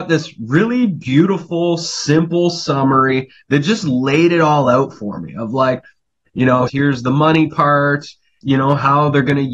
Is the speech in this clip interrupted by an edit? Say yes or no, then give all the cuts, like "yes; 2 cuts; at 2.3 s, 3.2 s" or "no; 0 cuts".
yes; 2 cuts; at 6.7 s, 8.4 s